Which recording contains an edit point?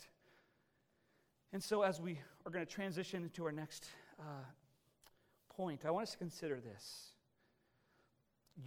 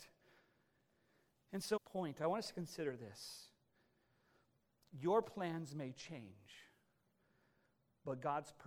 second; 1 cut; at 1.8 s

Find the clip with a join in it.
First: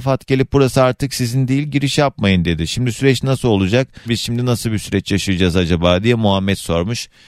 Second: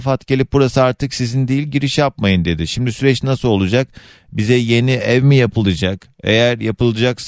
first; 1 cut; at 4.1 s

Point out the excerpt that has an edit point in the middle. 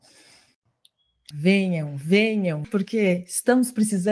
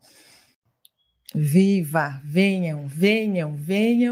first; 2 cuts; at 1.3 s, 2.6 s

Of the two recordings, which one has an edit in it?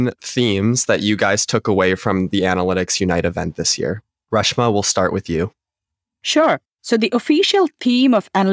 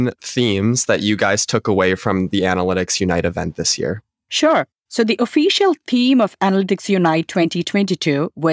second; 1 cut; at 4.1 s

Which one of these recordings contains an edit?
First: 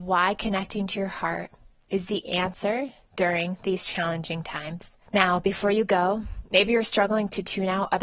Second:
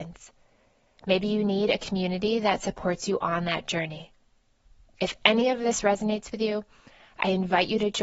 first; 1 cut; at 5.1 s

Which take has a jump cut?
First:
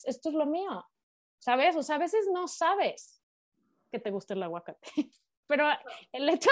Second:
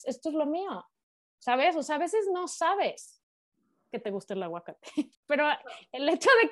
second; 1 cut; at 5.1 s

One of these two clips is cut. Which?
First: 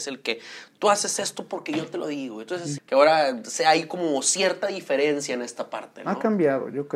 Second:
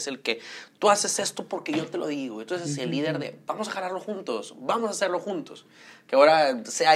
first; 1 cut; at 2.8 s

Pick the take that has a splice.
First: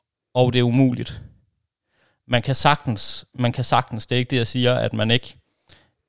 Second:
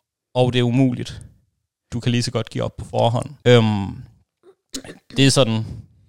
second; 2 cuts; at 1.9 s, 3.4 s

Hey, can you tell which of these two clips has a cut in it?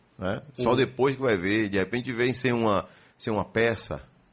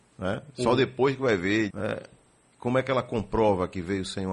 second; 1 cut; at 1.7 s

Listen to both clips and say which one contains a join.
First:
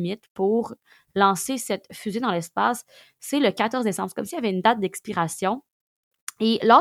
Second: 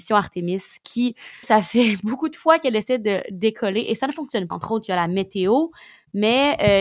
second; 2 cuts; at 1.4 s, 4.5 s

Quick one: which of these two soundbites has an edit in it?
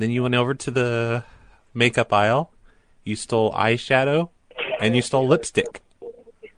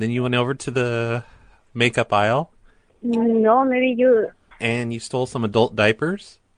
second; 2 cuts; at 2.9 s, 4.5 s

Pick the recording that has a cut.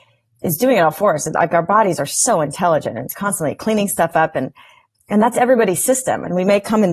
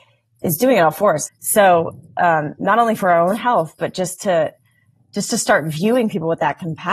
second; 1 cut; at 1.3 s

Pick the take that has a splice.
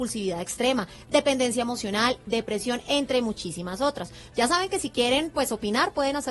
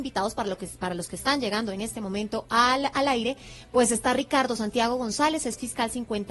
first; 1 cut; at 4.3 s

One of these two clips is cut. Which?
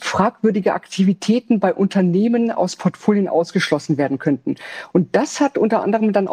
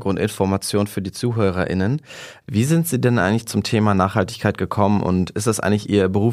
second; 1 cut; at 2.4 s

